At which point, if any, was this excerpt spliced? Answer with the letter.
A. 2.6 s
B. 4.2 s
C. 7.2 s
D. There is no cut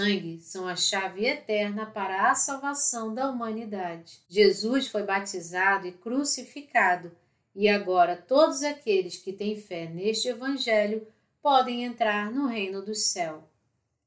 B